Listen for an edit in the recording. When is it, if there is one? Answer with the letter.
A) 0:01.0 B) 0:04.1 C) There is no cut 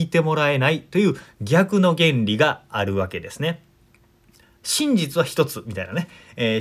C